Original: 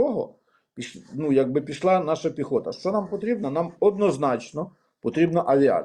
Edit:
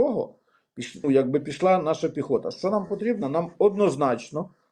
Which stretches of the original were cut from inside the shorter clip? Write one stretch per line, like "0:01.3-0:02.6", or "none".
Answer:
0:01.0-0:01.3